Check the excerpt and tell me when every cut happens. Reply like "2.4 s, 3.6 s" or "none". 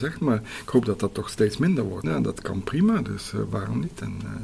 2.0 s